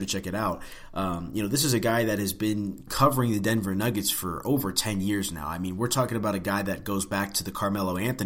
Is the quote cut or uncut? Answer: uncut